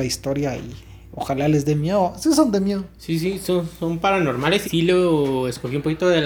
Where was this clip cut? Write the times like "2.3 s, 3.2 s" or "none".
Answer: 4.6 s